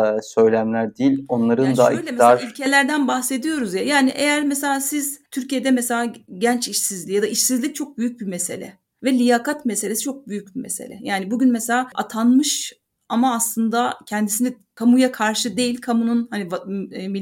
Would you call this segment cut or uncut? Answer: uncut